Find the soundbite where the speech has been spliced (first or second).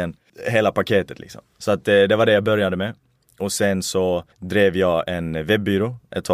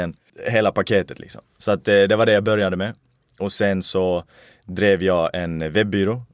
first